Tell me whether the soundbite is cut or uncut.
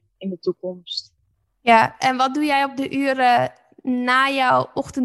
uncut